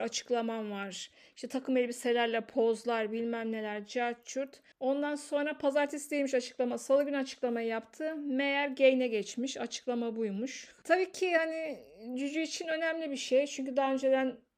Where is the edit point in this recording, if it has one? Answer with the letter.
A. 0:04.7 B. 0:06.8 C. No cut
A